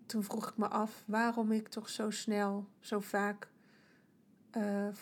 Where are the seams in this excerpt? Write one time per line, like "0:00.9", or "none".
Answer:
0:02.8